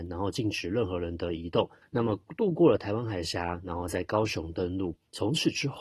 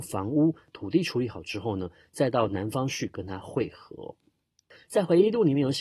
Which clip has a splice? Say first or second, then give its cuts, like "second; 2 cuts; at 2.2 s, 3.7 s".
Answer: first; 1 cut; at 1.8 s